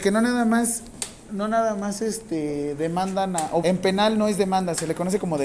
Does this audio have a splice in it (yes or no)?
yes